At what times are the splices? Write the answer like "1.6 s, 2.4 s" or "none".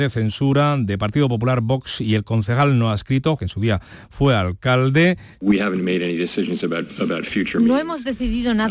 3.4 s, 5.4 s